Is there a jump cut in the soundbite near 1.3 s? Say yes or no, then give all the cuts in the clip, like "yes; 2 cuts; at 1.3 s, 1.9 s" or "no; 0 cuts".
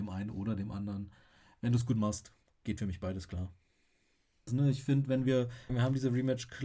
no; 2 cuts; at 4.5 s, 5.7 s